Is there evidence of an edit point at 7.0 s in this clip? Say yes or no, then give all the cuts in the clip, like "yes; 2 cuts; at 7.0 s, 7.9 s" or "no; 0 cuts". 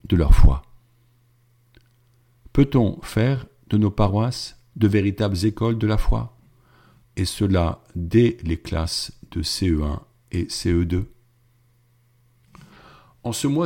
yes; 1 cut; at 7.0 s